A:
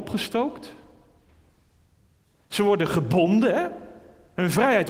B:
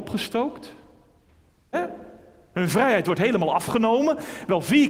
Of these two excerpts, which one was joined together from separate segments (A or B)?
B